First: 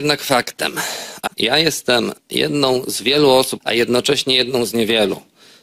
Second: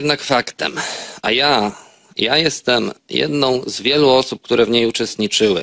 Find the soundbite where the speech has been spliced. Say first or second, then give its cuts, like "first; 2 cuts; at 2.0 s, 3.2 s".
first; 2 cuts; at 1.3 s, 3.6 s